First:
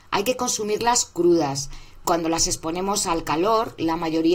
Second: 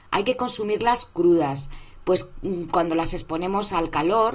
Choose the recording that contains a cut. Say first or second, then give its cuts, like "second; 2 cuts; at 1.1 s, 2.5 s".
first; 1 cut; at 2.0 s